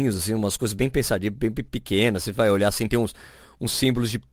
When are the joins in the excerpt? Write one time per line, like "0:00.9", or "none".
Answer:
none